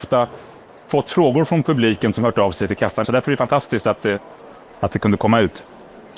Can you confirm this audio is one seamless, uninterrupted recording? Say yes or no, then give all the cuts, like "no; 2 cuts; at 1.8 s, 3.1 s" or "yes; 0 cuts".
no; 1 cut; at 3.0 s